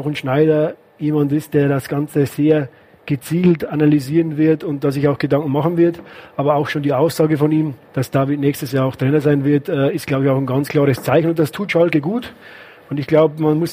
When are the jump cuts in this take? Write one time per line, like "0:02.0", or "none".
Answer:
0:07.8